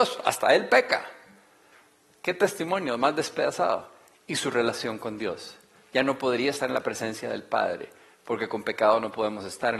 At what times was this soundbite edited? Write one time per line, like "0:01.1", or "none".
none